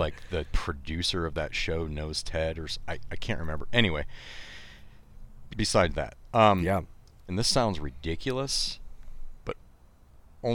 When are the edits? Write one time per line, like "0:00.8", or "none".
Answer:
0:05.5
0:07.3